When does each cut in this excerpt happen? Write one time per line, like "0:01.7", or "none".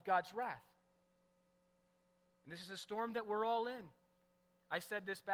none